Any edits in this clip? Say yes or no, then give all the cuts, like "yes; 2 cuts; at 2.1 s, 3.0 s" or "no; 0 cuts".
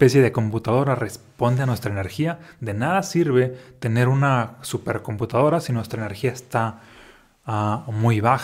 no; 0 cuts